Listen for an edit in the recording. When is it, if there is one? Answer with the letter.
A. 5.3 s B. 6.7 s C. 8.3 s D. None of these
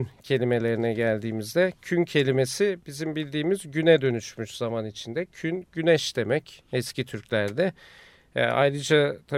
B